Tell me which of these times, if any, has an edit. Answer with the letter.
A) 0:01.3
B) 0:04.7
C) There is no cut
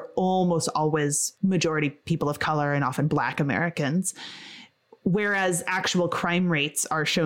A